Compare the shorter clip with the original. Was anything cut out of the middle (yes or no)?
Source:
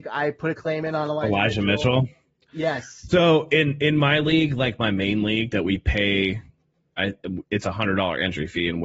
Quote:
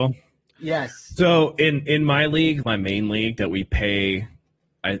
yes